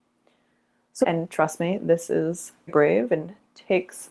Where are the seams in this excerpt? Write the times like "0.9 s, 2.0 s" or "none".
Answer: 1.0 s, 2.7 s